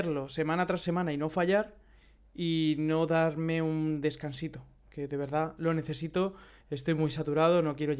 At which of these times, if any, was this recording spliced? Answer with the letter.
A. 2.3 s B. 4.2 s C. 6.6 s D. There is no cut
D